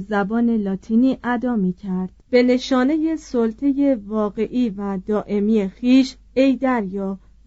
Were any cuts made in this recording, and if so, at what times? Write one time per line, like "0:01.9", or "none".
0:02.2